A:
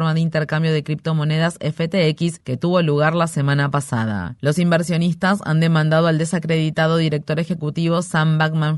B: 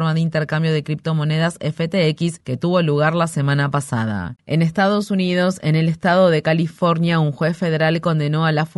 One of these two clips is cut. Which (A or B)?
B